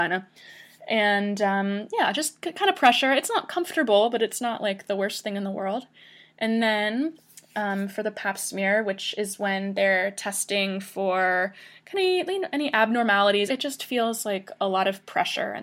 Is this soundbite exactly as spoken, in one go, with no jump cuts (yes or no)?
no